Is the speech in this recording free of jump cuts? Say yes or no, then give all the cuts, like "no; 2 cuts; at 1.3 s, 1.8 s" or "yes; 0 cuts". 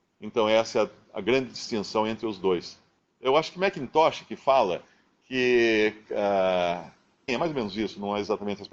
no; 2 cuts; at 3.0 s, 7.3 s